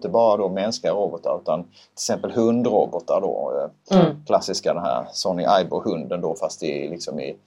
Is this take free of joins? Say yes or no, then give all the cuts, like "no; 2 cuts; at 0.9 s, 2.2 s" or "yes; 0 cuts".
yes; 0 cuts